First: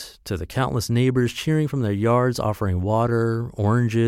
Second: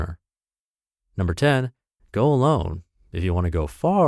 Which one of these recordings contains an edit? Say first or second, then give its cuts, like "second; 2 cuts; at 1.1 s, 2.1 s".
second; 1 cut; at 2.0 s